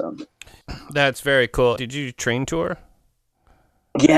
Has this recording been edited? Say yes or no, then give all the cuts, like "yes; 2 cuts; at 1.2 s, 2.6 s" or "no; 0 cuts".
yes; 1 cut; at 1.8 s